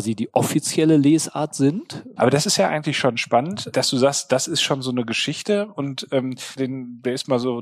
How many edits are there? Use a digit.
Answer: 3